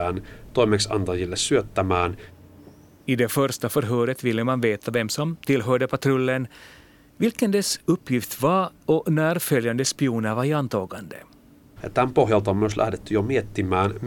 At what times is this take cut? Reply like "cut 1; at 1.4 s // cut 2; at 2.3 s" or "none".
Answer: cut 1; at 11.8 s

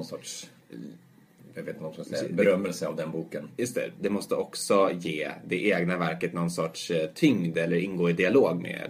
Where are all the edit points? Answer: cut 1; at 4.0 s

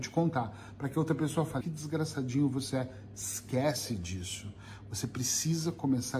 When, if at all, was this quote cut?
cut 1; at 1.6 s

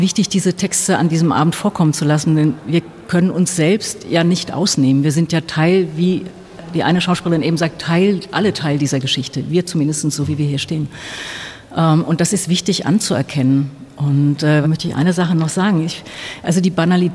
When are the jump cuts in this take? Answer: cut 1; at 14.6 s

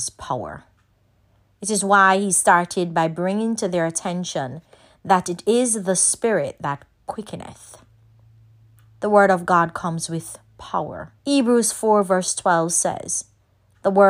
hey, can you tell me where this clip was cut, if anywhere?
cut 1; at 11.2 s

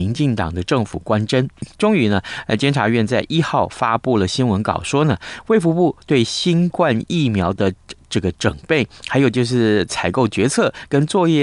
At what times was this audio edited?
cut 1; at 1.7 s

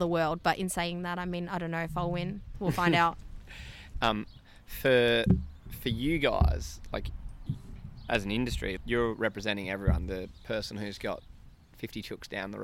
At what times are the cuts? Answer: cut 1; at 3.9 s // cut 2; at 8.8 s

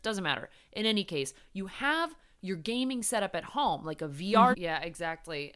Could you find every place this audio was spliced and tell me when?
cut 1; at 4.5 s

